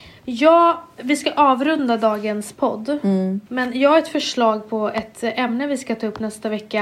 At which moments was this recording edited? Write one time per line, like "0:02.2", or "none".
0:03.5

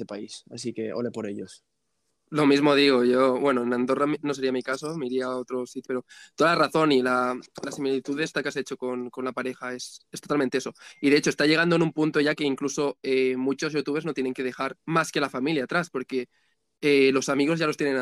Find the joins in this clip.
0:05.8

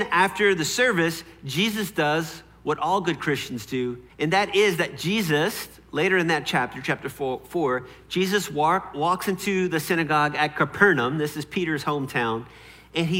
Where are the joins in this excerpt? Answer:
0:04.1

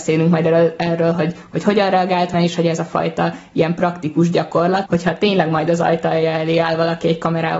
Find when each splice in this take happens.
0:02.3
0:04.9

